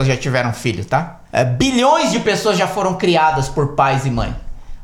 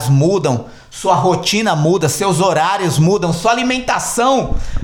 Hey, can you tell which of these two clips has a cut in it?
first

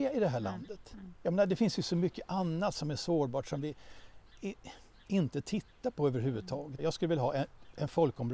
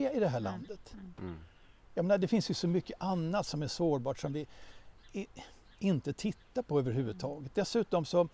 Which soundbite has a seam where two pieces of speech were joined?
first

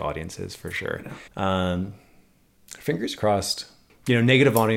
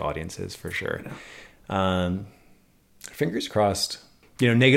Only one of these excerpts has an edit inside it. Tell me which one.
first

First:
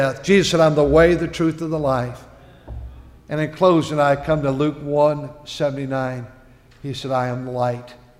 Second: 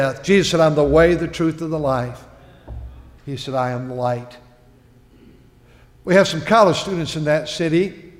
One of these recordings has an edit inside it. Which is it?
second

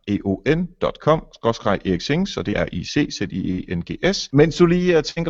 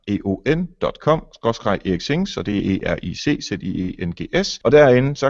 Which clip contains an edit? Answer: first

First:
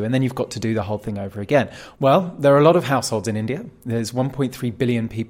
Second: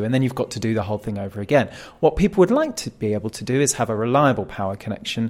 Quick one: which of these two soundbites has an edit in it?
first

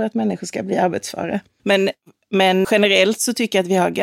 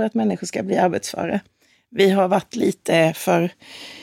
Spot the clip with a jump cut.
first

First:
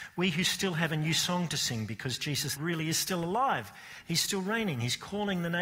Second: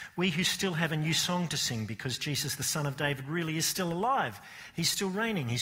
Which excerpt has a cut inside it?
first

